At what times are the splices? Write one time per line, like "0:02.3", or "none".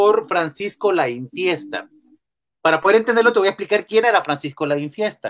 none